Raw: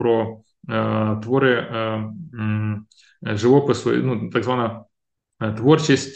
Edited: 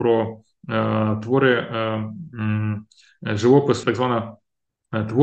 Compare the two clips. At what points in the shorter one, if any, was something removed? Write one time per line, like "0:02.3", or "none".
0:03.8